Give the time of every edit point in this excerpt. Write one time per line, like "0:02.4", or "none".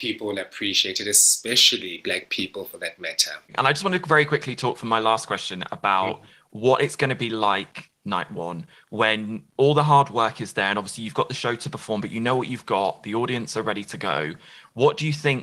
none